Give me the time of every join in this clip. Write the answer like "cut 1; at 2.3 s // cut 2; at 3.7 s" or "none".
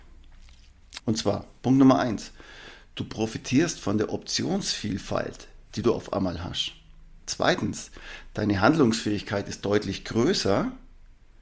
cut 1; at 1.0 s